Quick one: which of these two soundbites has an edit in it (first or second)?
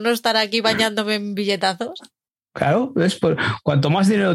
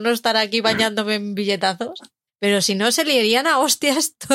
second